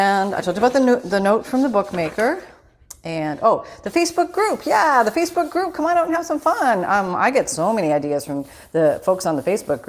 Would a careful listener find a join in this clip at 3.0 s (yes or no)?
no